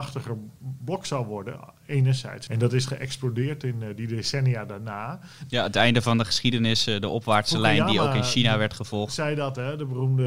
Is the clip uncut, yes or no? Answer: no